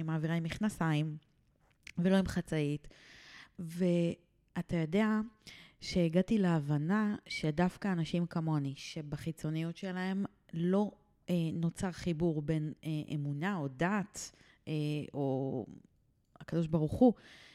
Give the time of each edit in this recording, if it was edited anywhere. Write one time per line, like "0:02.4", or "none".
none